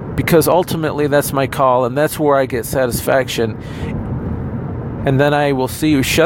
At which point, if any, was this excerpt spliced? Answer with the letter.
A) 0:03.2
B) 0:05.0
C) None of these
B